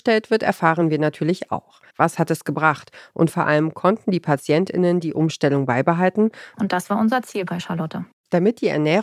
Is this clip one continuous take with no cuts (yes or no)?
no